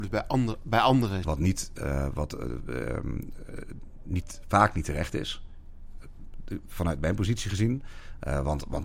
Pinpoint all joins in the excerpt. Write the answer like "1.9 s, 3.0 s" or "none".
1.2 s